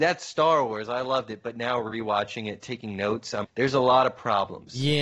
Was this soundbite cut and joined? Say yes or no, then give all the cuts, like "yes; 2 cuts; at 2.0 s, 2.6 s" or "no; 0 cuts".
yes; 1 cut; at 3.4 s